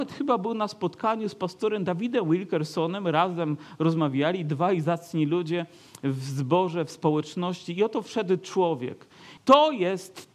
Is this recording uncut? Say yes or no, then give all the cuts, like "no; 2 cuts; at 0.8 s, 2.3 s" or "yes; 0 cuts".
no; 1 cut; at 9.4 s